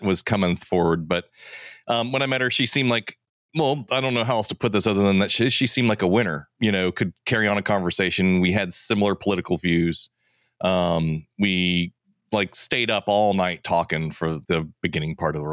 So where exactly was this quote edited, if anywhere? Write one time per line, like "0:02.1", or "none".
0:06.5
0:14.4